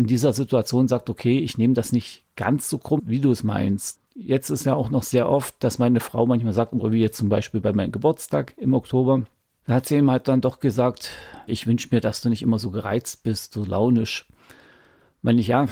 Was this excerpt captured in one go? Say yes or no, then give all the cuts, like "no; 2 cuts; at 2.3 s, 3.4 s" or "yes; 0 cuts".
no; 3 cuts; at 3.0 s, 4.1 s, 11.5 s